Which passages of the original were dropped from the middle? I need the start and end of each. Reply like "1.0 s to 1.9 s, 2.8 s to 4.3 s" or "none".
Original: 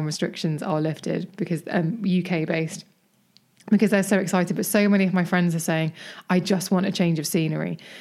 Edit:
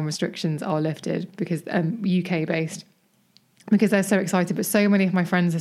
none